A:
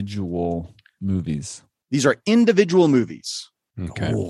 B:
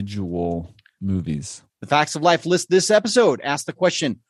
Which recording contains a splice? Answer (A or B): B